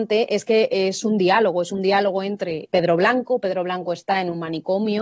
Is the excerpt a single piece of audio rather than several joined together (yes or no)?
no